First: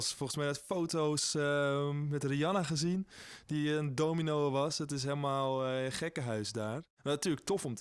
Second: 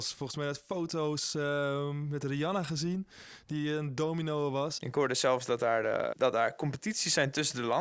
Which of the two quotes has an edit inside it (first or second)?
second